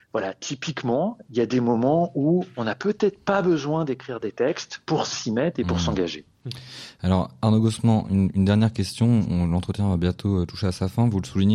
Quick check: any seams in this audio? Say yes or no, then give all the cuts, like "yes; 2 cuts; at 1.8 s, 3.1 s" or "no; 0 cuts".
no; 0 cuts